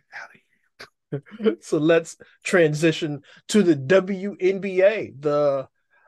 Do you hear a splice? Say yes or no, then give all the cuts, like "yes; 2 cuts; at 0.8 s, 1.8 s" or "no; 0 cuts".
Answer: no; 0 cuts